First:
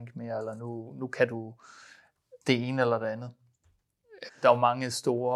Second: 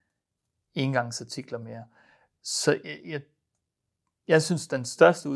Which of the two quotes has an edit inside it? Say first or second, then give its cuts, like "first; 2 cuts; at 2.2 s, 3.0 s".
first; 2 cuts; at 2.4 s, 4.3 s